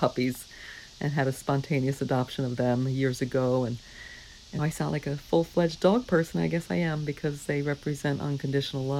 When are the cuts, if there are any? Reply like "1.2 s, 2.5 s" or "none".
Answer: 4.6 s